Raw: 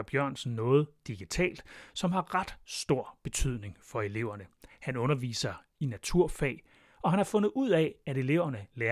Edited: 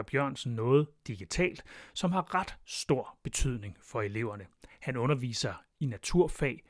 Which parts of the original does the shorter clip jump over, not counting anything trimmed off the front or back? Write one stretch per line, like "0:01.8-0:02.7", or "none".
none